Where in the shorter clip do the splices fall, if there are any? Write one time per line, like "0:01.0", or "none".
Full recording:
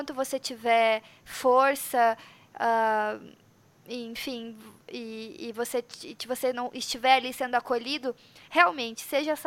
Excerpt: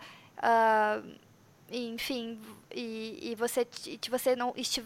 none